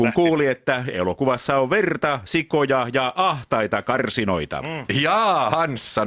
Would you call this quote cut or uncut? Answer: uncut